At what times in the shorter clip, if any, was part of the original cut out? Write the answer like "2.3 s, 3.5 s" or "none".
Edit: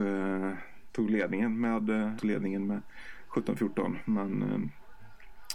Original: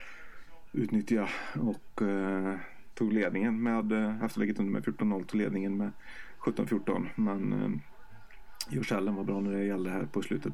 2.2 s